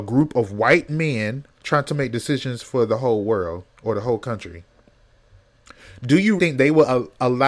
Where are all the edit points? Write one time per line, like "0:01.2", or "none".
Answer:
0:01.5
0:06.4